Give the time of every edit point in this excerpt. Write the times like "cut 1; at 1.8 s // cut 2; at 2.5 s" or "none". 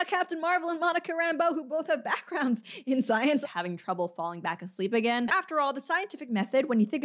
cut 1; at 3.4 s // cut 2; at 5.3 s